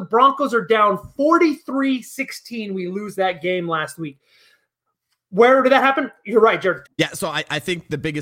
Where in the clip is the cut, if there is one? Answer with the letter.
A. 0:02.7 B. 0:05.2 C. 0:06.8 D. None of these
C